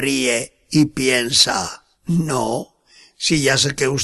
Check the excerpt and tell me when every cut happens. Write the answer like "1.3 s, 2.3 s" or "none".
1.9 s